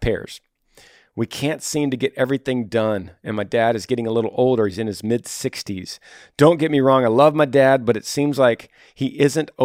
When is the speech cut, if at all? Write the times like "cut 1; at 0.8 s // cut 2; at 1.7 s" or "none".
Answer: none